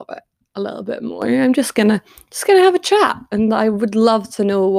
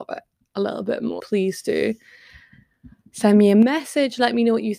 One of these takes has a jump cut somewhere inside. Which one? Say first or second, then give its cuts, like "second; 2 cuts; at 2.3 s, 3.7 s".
second; 1 cut; at 1.2 s